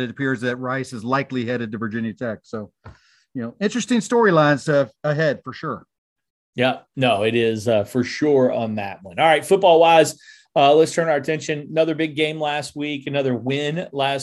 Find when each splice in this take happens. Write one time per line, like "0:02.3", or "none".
none